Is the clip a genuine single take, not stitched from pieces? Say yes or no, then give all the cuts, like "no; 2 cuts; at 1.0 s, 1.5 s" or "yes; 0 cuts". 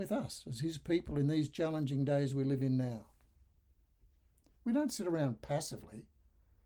yes; 0 cuts